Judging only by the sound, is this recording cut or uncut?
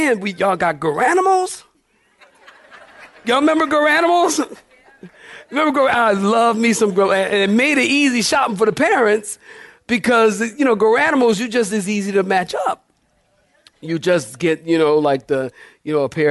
uncut